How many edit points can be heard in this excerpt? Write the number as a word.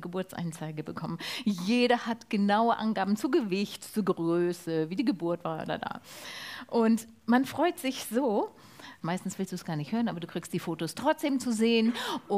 two